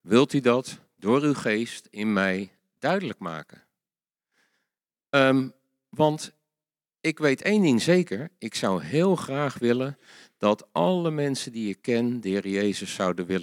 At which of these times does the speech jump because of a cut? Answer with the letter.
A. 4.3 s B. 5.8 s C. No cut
C